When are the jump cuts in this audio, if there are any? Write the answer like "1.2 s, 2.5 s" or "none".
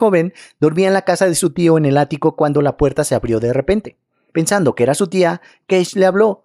4.3 s